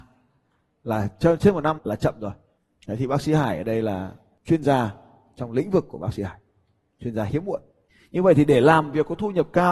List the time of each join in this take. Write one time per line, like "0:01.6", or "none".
0:01.8